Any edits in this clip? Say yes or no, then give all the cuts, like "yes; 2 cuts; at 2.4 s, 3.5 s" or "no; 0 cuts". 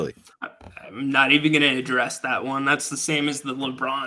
no; 0 cuts